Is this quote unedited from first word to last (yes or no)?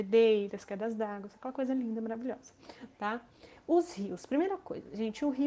yes